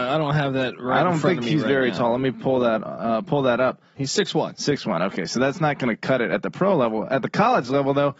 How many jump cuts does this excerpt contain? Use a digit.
1